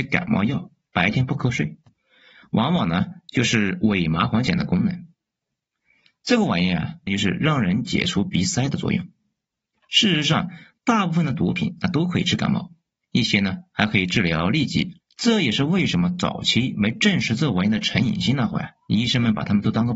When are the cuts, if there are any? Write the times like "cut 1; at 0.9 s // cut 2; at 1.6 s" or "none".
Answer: cut 1; at 7.1 s // cut 2; at 15.0 s